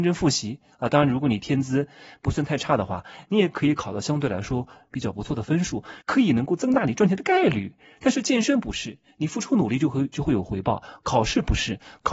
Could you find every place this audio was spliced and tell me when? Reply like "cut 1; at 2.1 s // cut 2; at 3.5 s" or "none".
cut 1; at 6.0 s

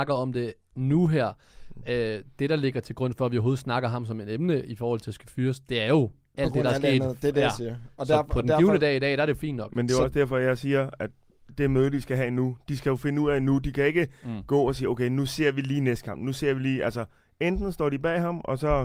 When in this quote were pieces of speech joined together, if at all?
none

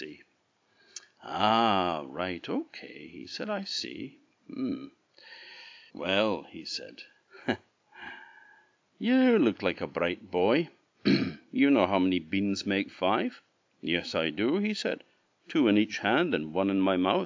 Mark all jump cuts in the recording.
cut 1; at 5.9 s

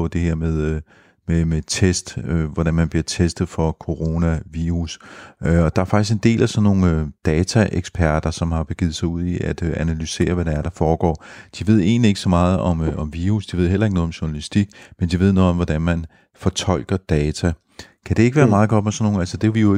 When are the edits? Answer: none

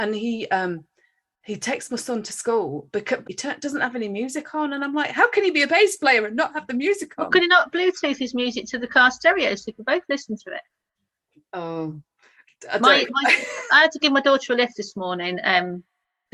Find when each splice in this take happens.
cut 1; at 3.2 s

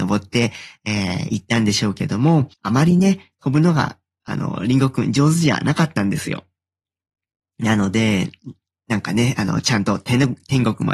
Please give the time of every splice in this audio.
cut 1; at 2.5 s

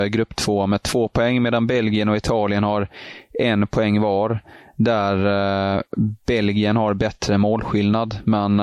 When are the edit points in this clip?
none

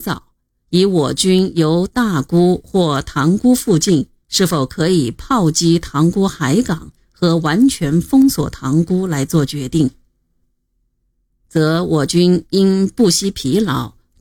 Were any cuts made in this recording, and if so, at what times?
cut 1; at 10.4 s

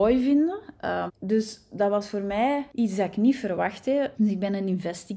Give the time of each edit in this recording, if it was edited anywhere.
cut 1; at 1.1 s // cut 2; at 4.1 s

